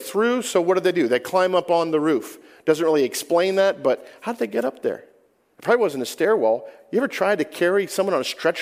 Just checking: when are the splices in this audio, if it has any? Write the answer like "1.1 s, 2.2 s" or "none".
5.5 s